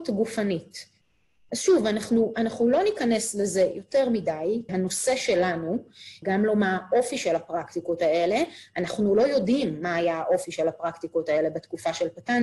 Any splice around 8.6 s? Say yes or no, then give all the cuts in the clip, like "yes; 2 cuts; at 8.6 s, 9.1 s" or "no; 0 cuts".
no; 2 cuts; at 4.7 s, 6.2 s